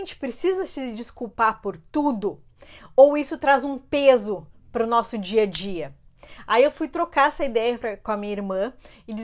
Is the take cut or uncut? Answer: uncut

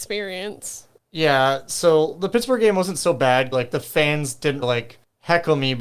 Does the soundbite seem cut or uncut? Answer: cut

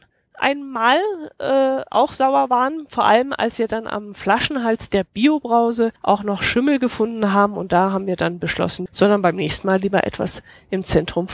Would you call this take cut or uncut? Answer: cut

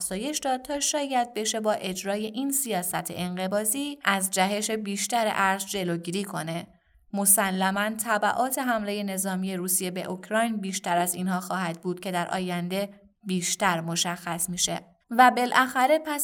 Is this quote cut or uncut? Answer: cut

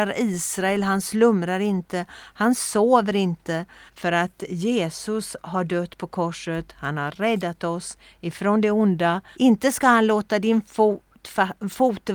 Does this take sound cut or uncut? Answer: cut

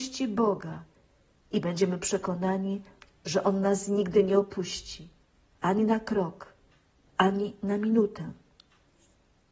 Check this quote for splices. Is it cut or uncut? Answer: uncut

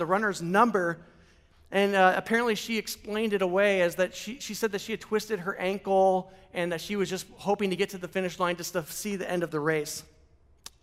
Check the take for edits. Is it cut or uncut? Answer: uncut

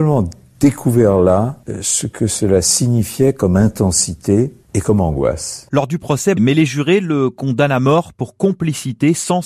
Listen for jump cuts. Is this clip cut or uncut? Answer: cut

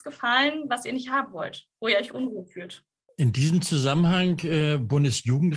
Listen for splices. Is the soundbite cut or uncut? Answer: uncut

